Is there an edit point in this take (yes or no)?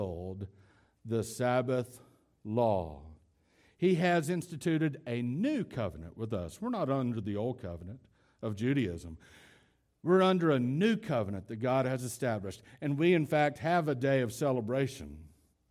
no